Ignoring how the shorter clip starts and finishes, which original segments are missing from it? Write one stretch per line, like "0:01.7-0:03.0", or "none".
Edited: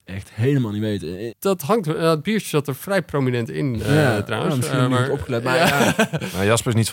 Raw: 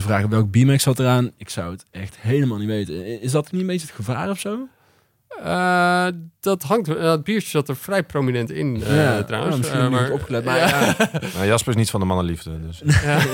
0:03.2-0:06.3